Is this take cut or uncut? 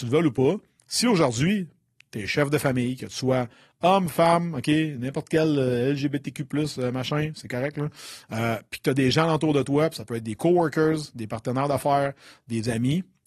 uncut